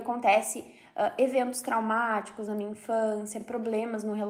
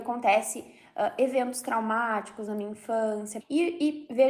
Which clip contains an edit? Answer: second; 1 cut; at 3.4 s

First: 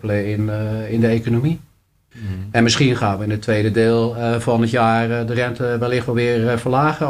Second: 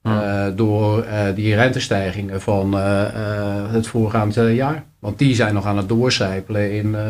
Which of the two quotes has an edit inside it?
first; 1 cut; at 2.1 s

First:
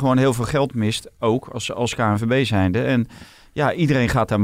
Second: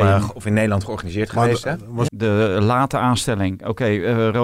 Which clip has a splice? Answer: second; 1 cut; at 2.1 s

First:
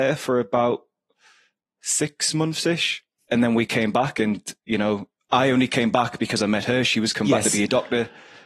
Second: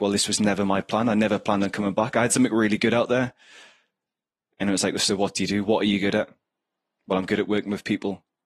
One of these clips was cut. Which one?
first; 1 cut; at 3.2 s

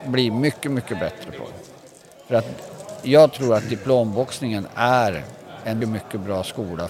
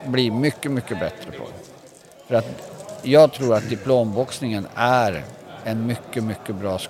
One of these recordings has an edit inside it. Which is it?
first; 1 cut; at 5.8 s

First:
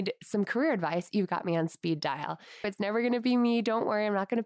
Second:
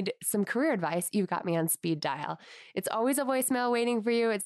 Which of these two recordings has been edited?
first; 1 cut; at 2.6 s

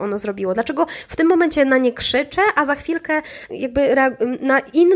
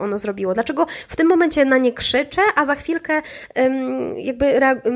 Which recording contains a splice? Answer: first; 1 cut; at 3.5 s

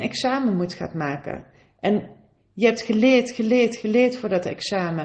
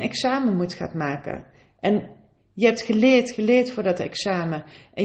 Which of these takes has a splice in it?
second; 1 cut; at 3.3 s

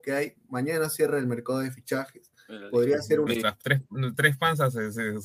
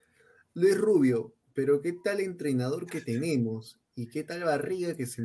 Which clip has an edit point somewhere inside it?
first; 1 cut; at 3.3 s

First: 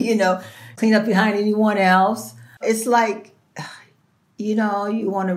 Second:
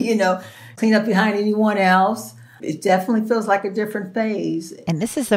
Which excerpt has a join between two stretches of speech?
first; 1 cut; at 2.6 s

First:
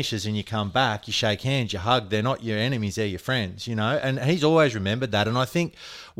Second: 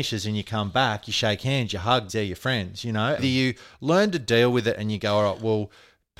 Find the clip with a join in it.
second; 2 cuts; at 2.1 s, 3.2 s

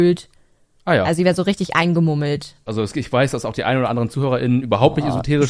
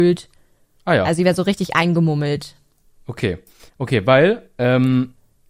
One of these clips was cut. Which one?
first; 1 cut; at 2.7 s

